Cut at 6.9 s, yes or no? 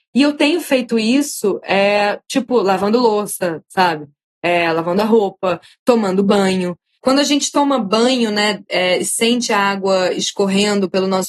no